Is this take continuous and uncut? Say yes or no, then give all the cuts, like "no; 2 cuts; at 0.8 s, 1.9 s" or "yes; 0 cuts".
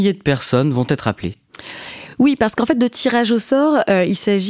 yes; 0 cuts